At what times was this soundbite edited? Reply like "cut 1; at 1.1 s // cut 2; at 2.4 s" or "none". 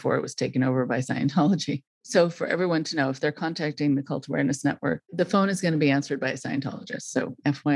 none